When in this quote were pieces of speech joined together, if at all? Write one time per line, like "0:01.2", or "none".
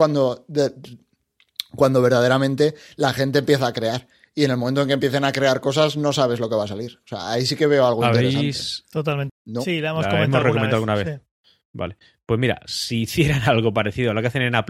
0:09.3